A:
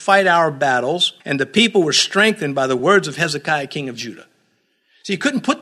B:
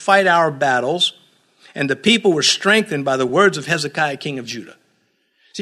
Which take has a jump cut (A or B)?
A